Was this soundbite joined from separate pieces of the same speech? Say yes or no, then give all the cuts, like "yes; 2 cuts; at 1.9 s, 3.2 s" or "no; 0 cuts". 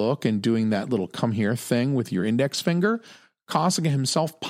no; 0 cuts